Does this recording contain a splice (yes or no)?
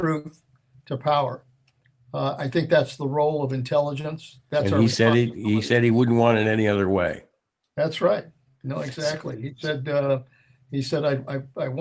no